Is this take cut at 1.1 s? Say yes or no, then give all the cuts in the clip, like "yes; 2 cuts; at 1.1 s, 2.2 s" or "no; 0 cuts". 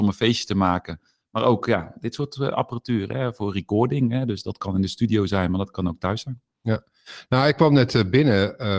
no; 0 cuts